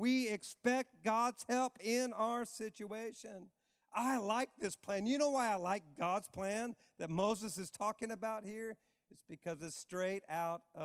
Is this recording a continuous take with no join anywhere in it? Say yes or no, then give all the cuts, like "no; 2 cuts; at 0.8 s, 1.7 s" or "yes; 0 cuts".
yes; 0 cuts